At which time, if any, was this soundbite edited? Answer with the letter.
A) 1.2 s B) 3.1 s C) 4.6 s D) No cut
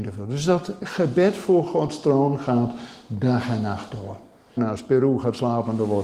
C